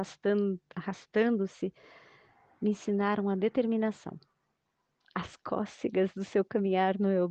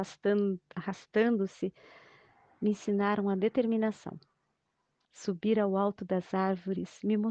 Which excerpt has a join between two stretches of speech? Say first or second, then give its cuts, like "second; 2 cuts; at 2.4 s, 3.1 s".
second; 1 cut; at 5.0 s